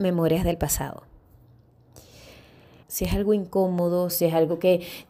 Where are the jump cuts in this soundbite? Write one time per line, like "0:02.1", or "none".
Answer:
0:02.8
0:04.1